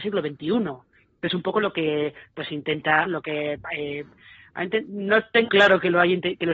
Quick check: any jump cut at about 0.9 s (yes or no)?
no